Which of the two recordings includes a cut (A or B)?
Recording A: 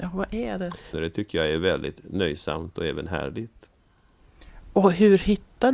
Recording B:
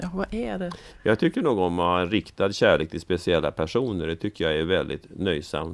A